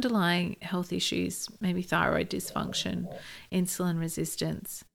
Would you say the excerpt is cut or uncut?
uncut